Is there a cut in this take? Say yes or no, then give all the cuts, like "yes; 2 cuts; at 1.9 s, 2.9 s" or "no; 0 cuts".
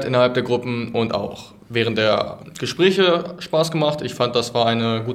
no; 0 cuts